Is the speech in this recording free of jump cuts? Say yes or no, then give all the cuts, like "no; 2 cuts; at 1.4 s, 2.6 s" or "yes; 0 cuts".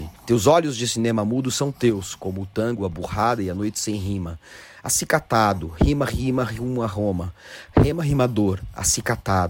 yes; 0 cuts